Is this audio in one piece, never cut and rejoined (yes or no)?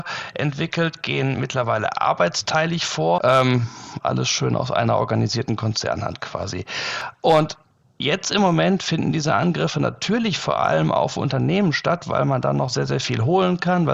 no